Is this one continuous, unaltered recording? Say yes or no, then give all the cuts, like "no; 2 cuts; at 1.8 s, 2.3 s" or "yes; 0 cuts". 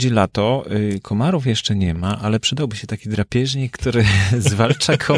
yes; 0 cuts